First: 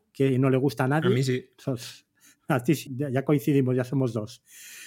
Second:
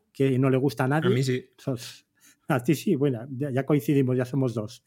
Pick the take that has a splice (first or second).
first